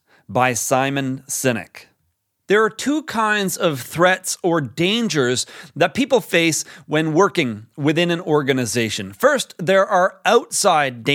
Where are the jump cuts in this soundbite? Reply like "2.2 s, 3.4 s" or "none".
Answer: none